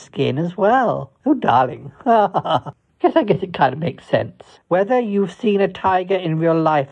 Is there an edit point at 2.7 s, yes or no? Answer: no